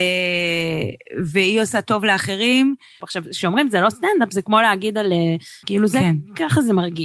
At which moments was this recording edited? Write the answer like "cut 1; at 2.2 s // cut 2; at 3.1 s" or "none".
cut 1; at 3.0 s // cut 2; at 5.6 s

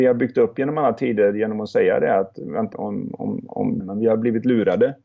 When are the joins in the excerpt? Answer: cut 1; at 2.7 s // cut 2; at 3.8 s

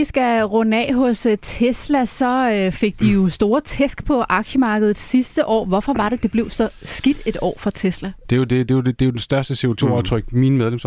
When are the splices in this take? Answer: cut 1; at 8.2 s

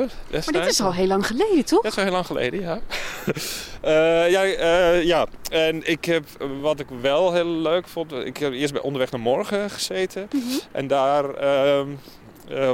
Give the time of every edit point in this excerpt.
none

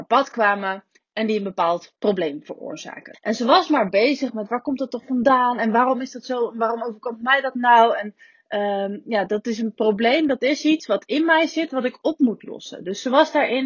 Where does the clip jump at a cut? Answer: cut 1; at 3.1 s

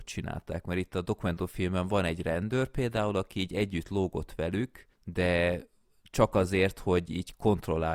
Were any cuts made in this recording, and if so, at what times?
cut 1; at 4.9 s

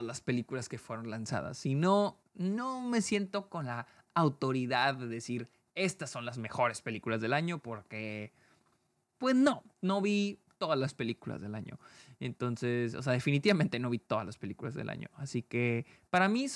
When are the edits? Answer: none

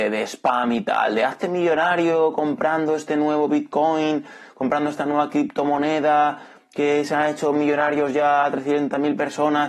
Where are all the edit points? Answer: none

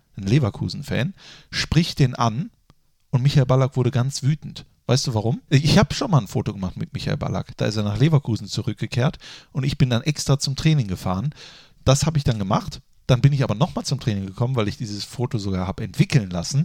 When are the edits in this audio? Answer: cut 1; at 5.5 s

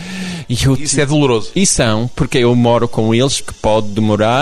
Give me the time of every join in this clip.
cut 1; at 1.5 s // cut 2; at 3.4 s

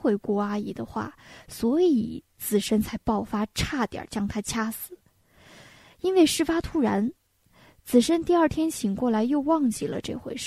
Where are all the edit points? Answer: none

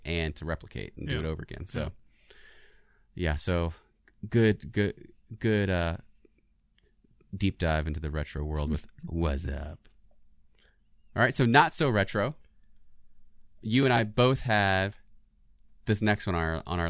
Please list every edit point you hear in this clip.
none

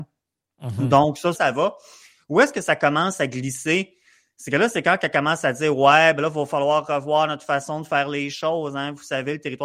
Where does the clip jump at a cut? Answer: cut 1; at 1.3 s

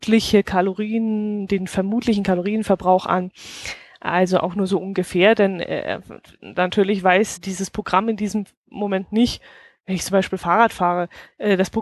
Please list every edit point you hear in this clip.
cut 1; at 7.4 s

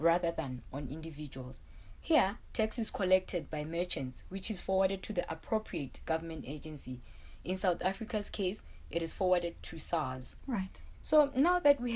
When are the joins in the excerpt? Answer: cut 1; at 10.9 s

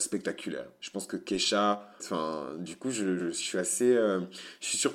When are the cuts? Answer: cut 1; at 2.0 s // cut 2; at 3.2 s

